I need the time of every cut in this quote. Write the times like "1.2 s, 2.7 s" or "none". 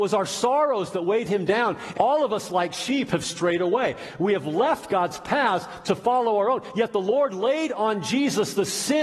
1.9 s